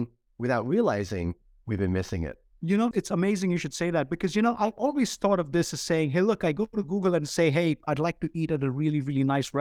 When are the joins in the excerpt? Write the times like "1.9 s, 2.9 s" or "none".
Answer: 2.9 s